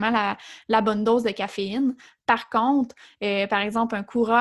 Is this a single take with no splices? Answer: yes; 0 cuts

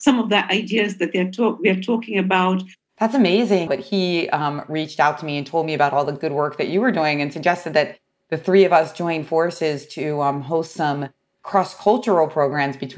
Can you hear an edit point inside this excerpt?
yes; 1 cut; at 3.7 s

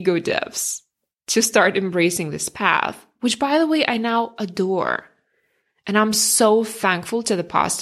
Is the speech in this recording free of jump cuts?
yes; 0 cuts

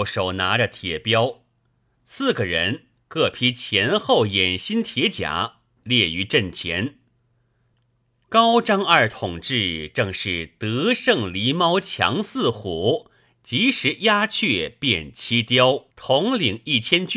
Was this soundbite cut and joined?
yes; 1 cut; at 15.9 s

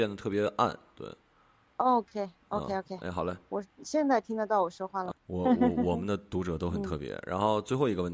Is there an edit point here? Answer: yes; 1 cut; at 5.1 s

